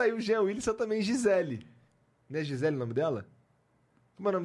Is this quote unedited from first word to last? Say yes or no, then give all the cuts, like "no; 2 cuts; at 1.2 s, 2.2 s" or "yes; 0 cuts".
yes; 0 cuts